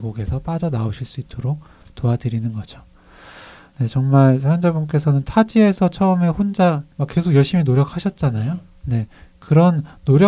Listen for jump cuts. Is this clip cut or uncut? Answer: uncut